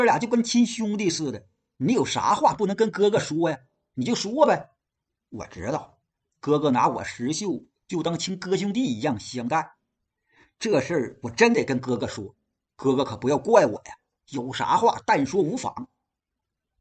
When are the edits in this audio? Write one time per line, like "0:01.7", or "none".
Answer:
0:14.1

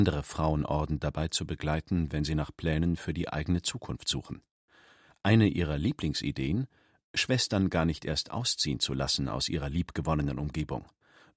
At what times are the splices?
none

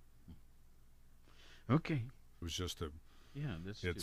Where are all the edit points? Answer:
0:02.4

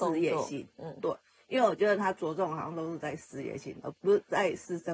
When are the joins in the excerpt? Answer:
0:03.9

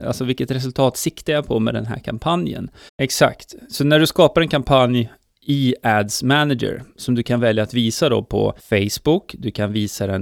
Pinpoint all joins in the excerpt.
0:02.9
0:08.6

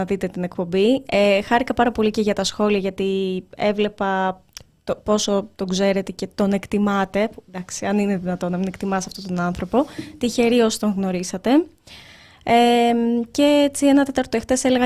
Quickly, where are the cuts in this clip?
none

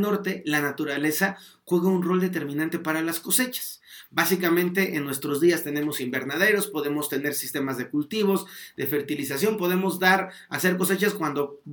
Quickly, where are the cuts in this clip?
none

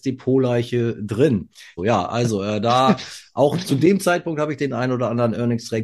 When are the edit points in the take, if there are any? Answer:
0:01.8

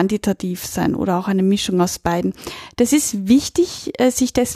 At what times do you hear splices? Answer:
none

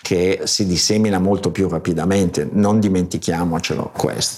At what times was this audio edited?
none

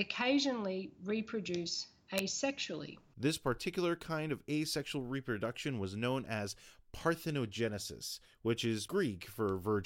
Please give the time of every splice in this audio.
none

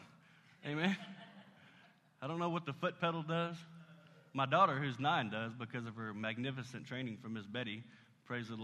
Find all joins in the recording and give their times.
none

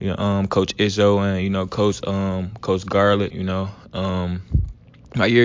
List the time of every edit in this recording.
0:03.3

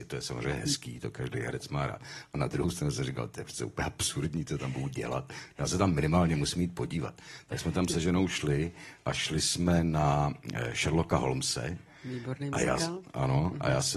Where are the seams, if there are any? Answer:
none

